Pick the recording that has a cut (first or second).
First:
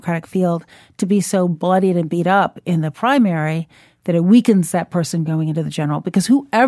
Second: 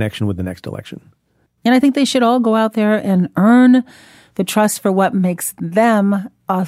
second